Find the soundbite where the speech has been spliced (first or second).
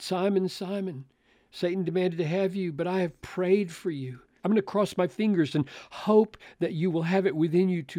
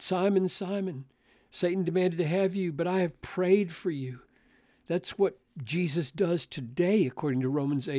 first